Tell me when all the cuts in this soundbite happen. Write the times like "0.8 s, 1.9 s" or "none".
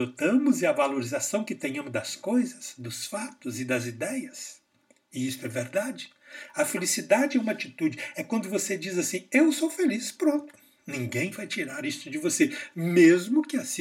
none